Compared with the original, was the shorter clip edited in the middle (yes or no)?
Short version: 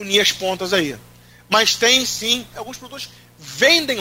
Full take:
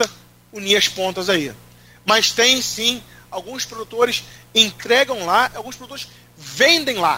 yes